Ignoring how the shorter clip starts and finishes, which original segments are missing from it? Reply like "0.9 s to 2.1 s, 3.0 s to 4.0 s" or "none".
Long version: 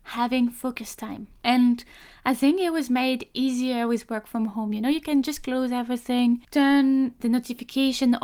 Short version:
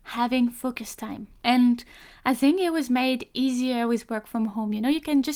none